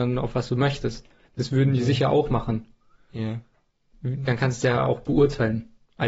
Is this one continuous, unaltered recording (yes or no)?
no